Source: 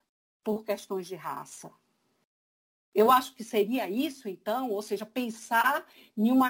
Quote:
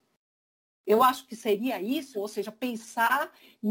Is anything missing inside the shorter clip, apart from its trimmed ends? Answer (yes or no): yes